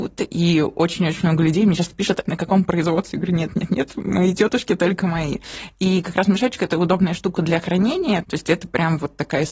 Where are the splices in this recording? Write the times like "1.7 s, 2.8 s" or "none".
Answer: 2.3 s, 8.2 s